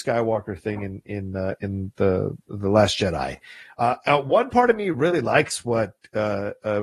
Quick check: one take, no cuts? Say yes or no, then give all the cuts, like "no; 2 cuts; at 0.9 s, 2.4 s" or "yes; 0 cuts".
yes; 0 cuts